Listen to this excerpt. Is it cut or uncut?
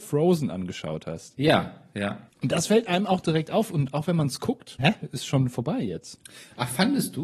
cut